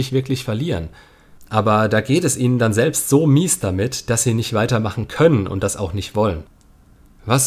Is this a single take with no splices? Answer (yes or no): yes